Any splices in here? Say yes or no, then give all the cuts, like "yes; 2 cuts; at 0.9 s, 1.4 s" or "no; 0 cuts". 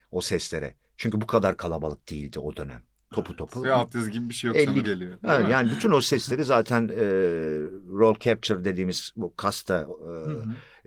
yes; 1 cut; at 4.8 s